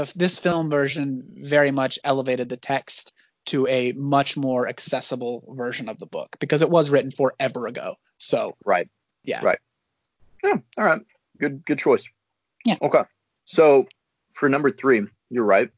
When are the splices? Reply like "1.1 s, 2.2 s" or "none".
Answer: none